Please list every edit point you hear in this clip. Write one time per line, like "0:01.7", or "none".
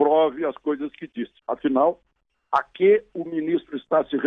0:01.4

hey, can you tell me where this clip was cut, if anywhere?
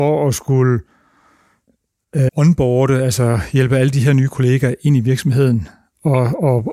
0:02.3

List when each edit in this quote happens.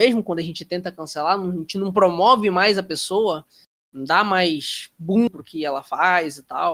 0:05.3

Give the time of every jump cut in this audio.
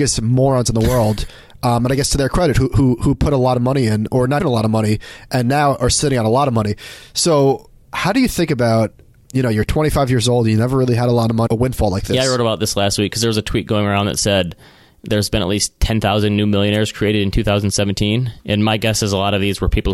0:04.4
0:11.5

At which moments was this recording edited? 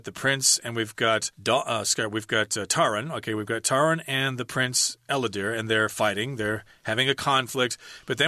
0:01.3

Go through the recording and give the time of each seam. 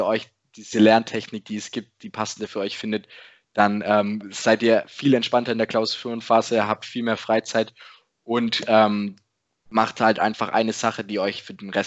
none

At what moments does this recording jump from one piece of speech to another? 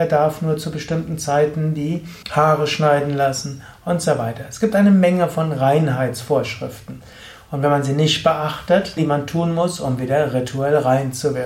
0:02.2
0:09.0

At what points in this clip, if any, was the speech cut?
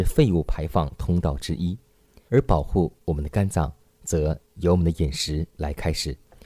0:02.3

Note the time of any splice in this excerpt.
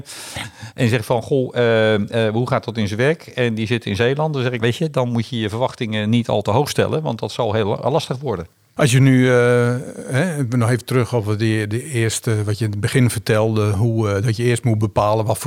0:04.6

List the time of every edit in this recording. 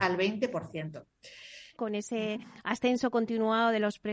0:01.7

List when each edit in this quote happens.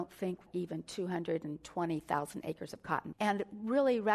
0:03.1

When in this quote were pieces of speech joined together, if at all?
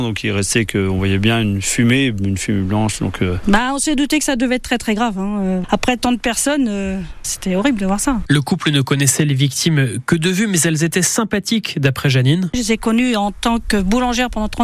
none

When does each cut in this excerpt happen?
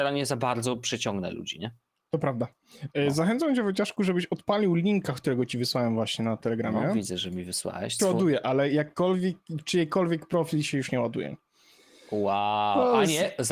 0:08.0

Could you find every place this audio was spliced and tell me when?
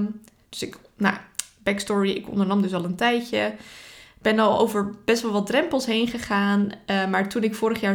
none

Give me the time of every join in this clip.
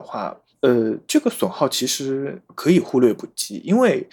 none

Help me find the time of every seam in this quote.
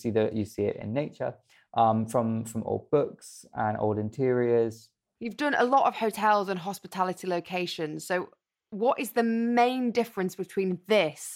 none

